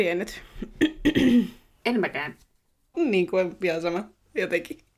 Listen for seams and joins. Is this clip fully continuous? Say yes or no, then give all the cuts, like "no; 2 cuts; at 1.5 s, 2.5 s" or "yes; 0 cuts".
no; 1 cut; at 2.9 s